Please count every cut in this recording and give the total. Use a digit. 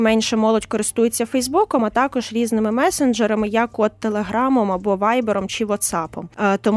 0